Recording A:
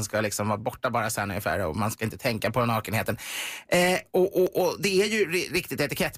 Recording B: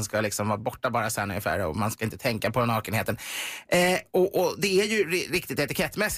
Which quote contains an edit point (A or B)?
B